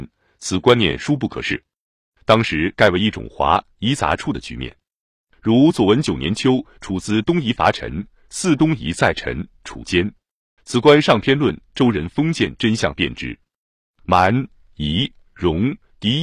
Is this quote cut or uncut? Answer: cut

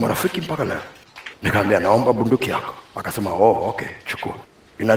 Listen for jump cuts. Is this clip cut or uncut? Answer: cut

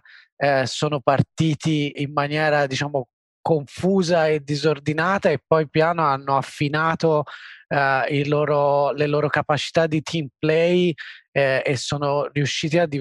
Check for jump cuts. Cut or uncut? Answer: cut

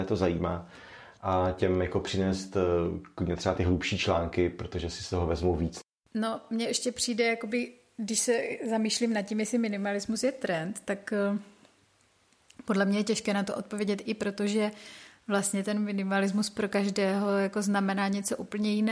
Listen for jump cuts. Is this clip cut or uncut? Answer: uncut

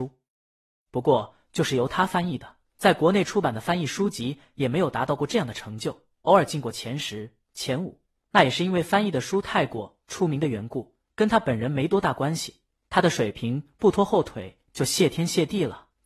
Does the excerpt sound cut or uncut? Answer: uncut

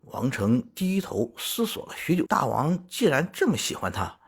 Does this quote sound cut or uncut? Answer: cut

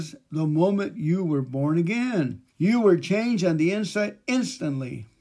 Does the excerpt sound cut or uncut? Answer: cut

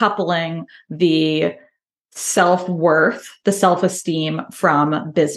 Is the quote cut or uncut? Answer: uncut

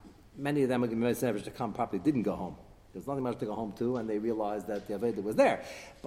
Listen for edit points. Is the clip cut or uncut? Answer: uncut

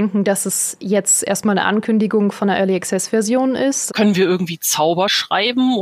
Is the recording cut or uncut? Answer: cut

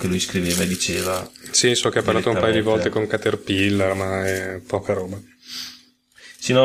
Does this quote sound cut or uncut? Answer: uncut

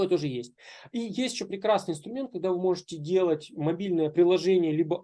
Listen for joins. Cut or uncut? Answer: uncut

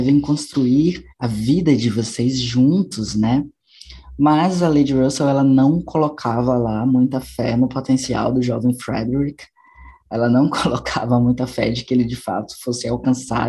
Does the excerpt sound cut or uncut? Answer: cut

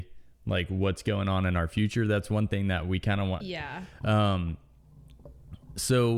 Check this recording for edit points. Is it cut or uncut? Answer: cut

